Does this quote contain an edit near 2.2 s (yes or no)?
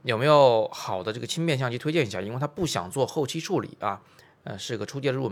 no